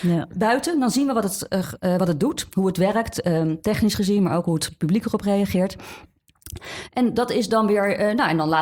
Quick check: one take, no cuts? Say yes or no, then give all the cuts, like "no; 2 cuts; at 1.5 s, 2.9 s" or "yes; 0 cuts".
yes; 0 cuts